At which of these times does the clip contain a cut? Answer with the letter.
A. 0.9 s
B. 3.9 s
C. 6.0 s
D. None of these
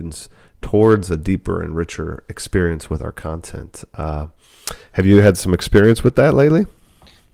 D